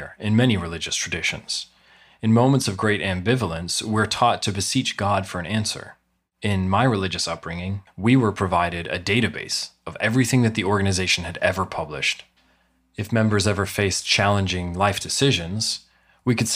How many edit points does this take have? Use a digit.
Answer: 1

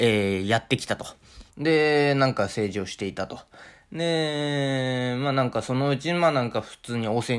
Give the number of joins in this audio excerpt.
1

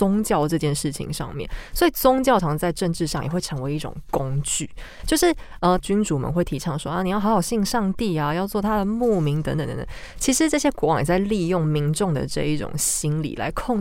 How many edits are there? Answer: 2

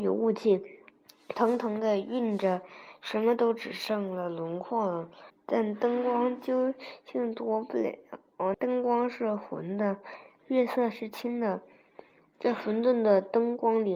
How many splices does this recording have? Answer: 2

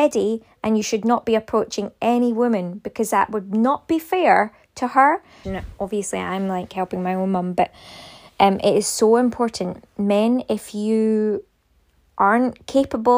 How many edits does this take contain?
1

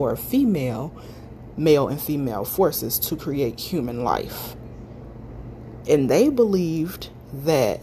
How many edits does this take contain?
2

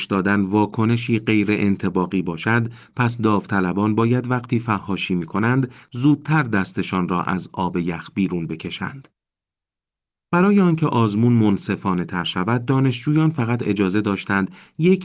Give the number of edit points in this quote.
1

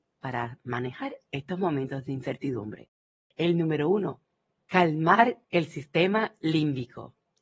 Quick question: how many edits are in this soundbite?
1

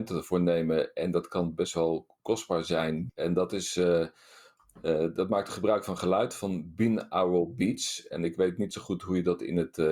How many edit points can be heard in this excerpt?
1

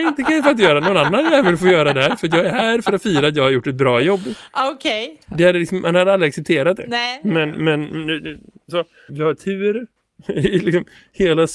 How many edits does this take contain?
1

